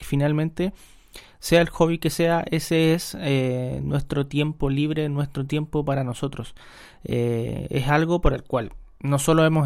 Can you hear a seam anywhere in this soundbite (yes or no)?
no